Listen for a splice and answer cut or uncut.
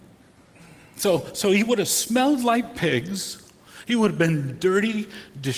uncut